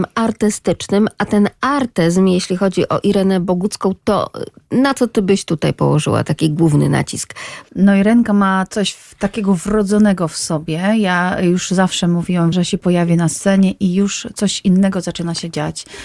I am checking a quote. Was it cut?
yes; 2 cuts; at 7.6 s, 12.5 s

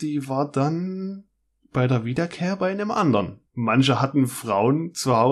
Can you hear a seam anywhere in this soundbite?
yes; 1 cut; at 3.5 s

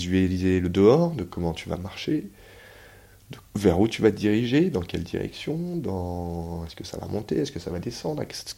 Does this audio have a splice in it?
yes; 1 cut; at 3.5 s

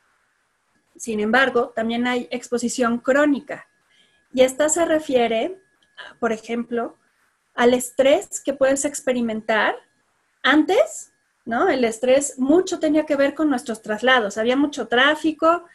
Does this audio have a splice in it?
no; 0 cuts

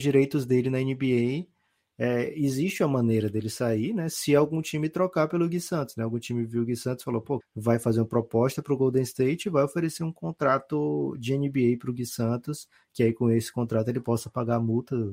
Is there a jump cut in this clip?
yes; 1 cut; at 7.4 s

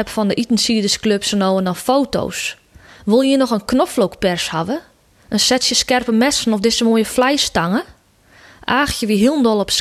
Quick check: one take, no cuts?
yes; 0 cuts

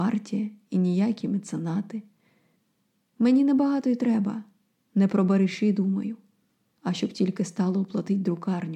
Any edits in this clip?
no; 0 cuts

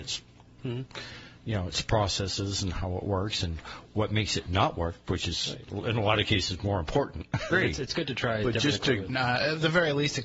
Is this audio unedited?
no; 2 cuts; at 7.5 s, 9.1 s

